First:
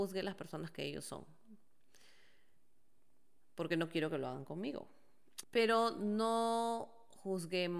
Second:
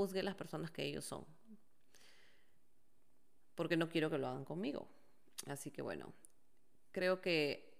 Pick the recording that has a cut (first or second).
first